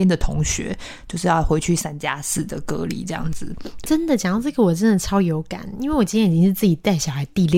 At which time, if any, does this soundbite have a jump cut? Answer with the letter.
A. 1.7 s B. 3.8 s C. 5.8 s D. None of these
B